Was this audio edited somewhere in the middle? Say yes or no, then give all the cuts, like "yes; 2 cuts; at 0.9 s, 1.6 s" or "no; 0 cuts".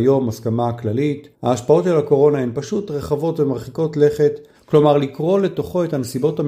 yes; 2 cuts; at 1.3 s, 4.5 s